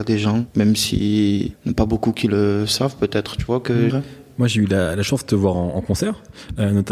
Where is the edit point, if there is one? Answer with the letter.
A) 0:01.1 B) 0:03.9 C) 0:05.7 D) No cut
B